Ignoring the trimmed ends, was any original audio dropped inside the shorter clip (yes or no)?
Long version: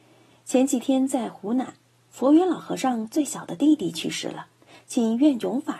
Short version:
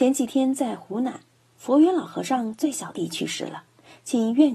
yes